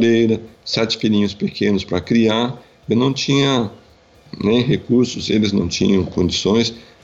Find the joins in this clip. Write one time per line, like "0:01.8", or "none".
none